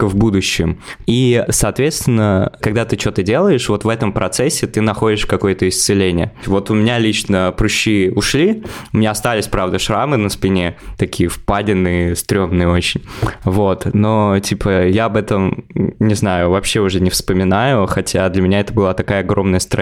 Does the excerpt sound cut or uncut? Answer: uncut